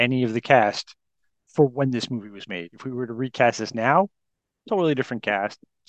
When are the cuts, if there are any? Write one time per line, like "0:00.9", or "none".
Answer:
none